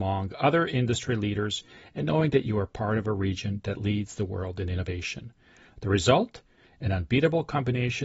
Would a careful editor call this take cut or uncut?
uncut